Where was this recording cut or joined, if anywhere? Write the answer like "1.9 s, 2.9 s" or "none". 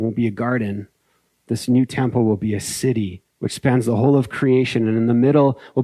3.3 s